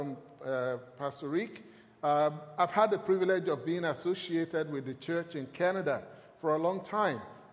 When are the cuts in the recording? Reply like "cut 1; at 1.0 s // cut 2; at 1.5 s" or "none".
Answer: none